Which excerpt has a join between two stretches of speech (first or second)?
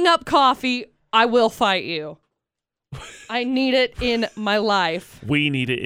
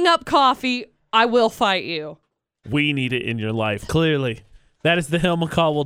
second